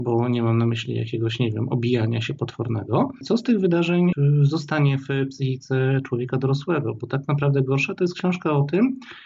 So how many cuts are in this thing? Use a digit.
0